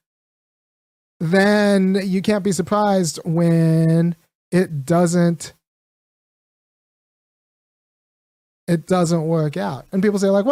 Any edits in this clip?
no; 0 cuts

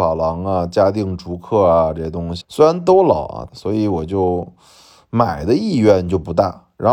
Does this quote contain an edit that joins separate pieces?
yes; 2 cuts; at 2.4 s, 3.5 s

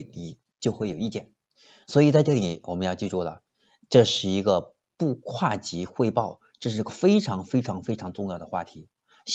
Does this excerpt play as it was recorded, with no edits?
yes; 0 cuts

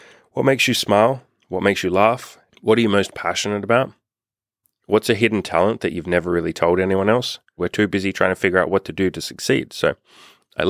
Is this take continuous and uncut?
no; 2 cuts; at 2.5 s, 7.6 s

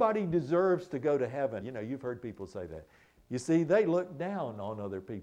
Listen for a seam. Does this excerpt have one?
yes; 2 cuts; at 1.6 s, 3.2 s

